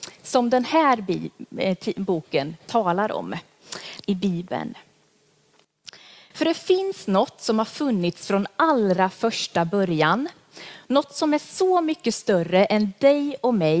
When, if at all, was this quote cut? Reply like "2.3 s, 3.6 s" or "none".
2.6 s, 4.0 s